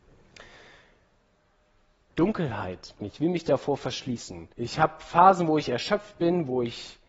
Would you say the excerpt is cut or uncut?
cut